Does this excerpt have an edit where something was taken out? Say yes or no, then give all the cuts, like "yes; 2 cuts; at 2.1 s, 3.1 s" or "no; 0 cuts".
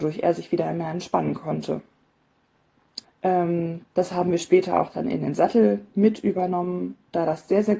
yes; 1 cut; at 3.0 s